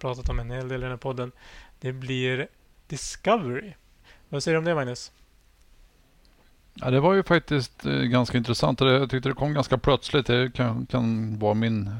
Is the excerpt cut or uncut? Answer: uncut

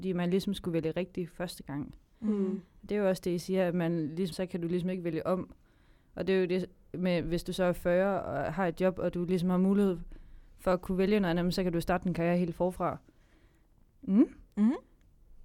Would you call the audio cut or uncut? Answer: cut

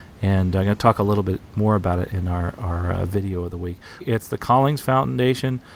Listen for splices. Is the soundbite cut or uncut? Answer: cut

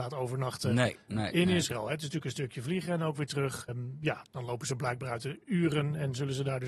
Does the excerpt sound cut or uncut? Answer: cut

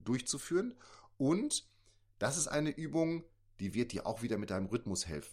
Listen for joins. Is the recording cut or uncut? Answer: uncut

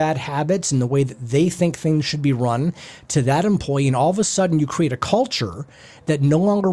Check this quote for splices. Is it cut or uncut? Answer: uncut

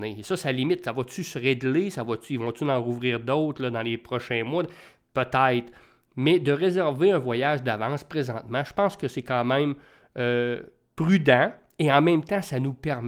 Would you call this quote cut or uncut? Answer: uncut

